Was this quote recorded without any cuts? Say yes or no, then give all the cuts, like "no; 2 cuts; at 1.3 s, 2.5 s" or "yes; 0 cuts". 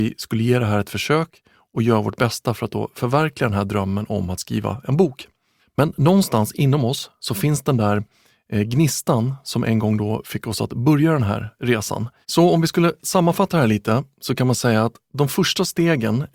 no; 2 cuts; at 5.6 s, 12.2 s